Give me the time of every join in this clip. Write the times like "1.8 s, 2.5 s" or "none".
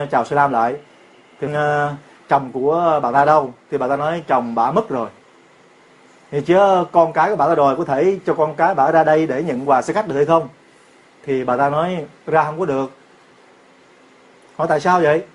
1.5 s